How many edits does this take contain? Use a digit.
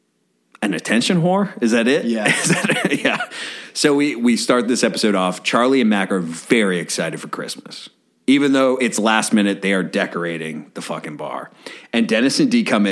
0